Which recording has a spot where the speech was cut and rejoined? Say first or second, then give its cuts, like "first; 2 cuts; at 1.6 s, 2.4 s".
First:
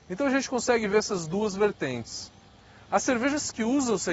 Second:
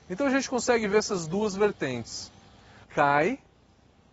second; 1 cut; at 2.8 s